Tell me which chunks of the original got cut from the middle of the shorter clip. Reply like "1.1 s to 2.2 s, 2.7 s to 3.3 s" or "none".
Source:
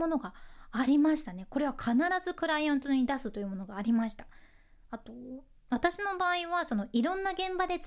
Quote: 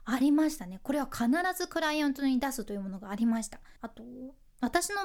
4.4 s to 4.9 s